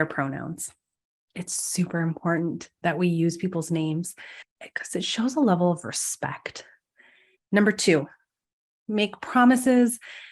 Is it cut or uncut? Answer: cut